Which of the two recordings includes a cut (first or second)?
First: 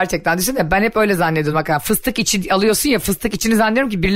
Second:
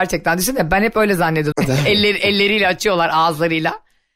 second